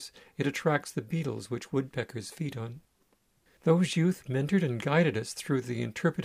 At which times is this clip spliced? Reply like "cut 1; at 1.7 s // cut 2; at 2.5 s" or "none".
cut 1; at 3.5 s